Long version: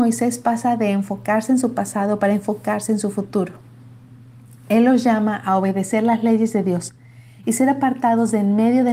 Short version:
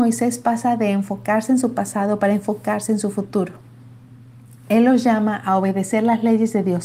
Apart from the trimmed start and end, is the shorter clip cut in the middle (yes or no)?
no